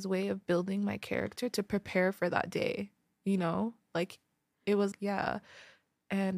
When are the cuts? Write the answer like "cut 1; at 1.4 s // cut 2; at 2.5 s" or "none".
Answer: cut 1; at 4.9 s